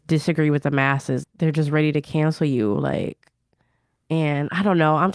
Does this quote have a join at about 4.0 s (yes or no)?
no